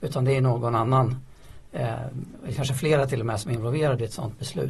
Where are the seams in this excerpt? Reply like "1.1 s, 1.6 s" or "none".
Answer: none